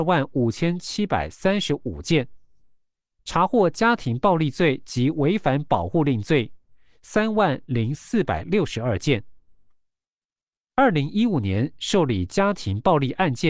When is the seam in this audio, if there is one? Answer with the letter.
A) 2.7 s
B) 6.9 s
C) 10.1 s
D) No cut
D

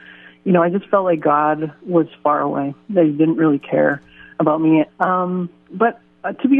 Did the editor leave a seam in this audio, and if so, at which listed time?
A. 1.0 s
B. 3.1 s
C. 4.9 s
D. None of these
C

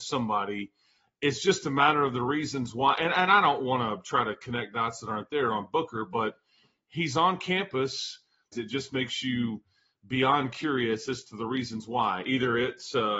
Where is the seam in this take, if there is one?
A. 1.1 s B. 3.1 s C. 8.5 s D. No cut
C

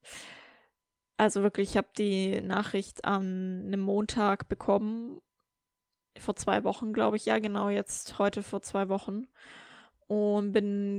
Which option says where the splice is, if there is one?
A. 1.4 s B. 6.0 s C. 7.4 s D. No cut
D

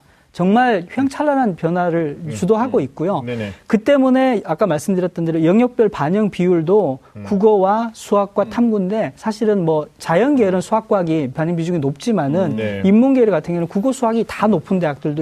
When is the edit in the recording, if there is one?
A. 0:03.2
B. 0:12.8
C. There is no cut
C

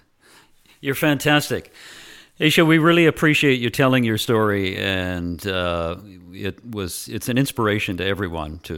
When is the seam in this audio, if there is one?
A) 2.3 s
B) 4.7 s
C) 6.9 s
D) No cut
D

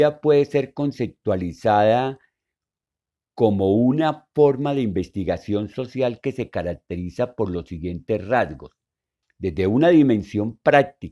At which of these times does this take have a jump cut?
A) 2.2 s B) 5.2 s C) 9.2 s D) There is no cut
C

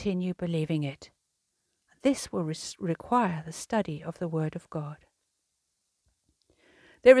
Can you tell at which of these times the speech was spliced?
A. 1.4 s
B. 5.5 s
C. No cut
C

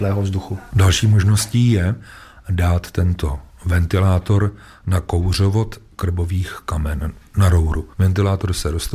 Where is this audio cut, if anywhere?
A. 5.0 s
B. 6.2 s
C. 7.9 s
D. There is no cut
C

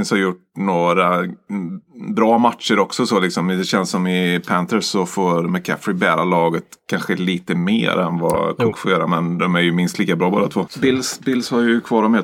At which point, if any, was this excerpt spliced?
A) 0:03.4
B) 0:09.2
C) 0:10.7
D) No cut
C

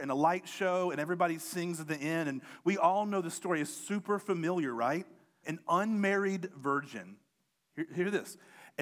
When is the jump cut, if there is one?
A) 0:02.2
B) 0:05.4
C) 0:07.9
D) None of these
B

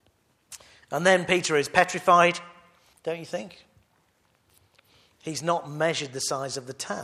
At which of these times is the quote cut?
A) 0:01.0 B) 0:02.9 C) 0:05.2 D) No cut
B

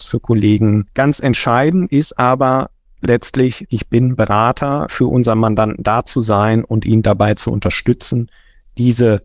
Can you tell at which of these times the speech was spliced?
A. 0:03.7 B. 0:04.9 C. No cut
B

